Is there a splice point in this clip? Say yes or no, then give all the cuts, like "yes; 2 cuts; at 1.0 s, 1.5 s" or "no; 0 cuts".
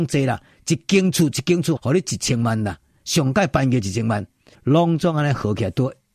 yes; 2 cuts; at 1.8 s, 4.5 s